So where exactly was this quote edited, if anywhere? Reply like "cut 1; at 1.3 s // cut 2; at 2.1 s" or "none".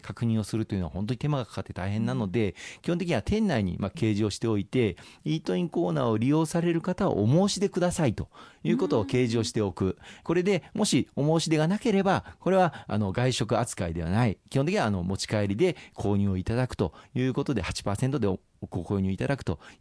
none